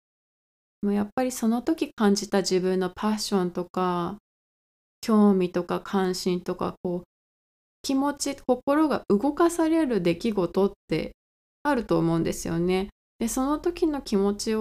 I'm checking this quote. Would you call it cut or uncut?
uncut